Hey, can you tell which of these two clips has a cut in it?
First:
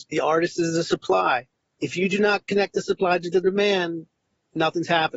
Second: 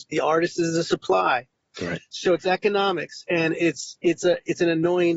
second; 1 cut; at 1.7 s

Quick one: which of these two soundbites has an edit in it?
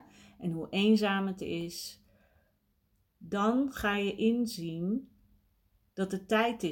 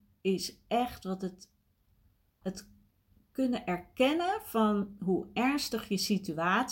second; 1 cut; at 2.4 s

